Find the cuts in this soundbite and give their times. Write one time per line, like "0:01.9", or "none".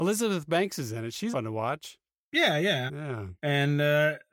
0:01.3
0:02.9